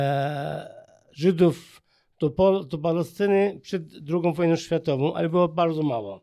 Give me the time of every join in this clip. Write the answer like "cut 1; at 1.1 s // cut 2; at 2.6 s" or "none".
none